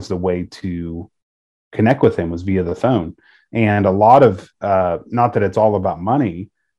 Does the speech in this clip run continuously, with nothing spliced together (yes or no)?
yes